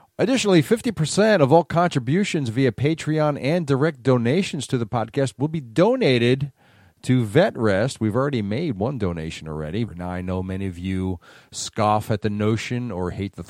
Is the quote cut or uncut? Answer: cut